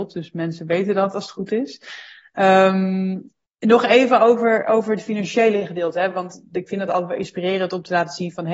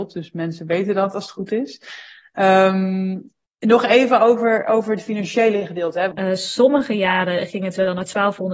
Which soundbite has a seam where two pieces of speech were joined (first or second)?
second